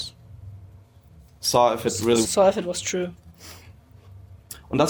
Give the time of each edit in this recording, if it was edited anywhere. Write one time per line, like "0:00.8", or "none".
0:02.3